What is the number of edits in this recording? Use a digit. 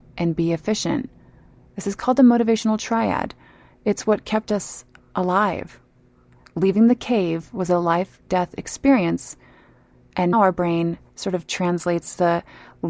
1